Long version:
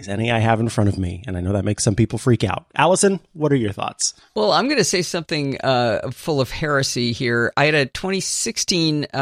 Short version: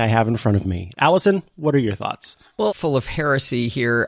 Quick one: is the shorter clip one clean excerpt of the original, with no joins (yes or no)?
no